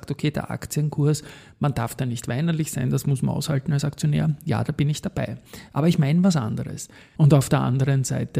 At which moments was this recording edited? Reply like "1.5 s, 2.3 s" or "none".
7.2 s

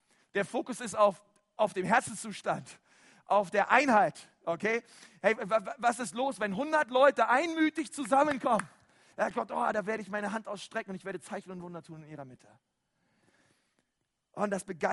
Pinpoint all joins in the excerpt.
9.1 s

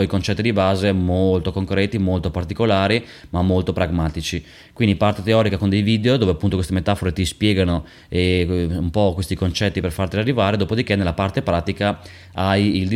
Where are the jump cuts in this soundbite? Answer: none

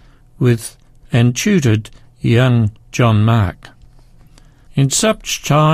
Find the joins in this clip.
4.7 s

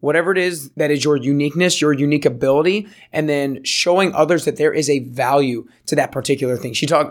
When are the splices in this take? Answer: none

